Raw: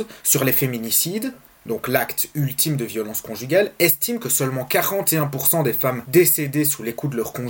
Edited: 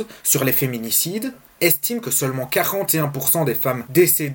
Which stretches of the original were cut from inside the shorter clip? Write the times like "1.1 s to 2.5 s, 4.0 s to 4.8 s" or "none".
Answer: 1.6 s to 3.8 s